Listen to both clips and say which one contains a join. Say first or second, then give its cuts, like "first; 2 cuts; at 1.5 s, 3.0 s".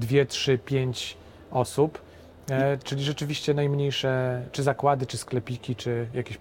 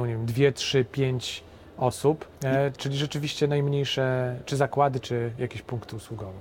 second; 2 cuts; at 2.3 s, 5.0 s